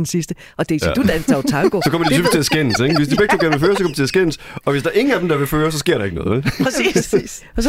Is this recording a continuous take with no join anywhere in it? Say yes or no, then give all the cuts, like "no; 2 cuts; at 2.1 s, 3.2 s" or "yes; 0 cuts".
yes; 0 cuts